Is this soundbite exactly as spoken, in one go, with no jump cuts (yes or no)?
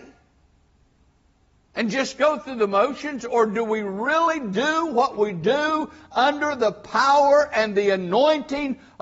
yes